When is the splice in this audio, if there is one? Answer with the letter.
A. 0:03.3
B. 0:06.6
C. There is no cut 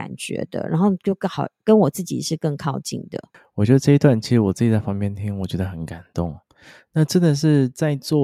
C